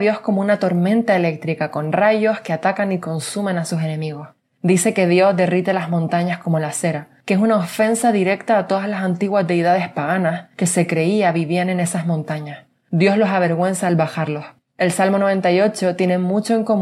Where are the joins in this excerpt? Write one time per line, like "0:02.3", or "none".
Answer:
0:14.6